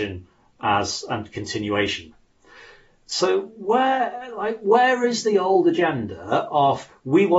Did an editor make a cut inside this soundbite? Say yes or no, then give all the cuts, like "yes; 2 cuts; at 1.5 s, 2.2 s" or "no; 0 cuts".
no; 0 cuts